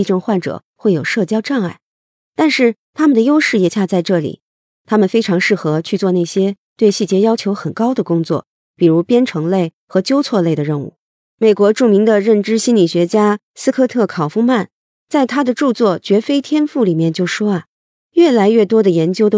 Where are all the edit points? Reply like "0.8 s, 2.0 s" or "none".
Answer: 3.7 s, 11.2 s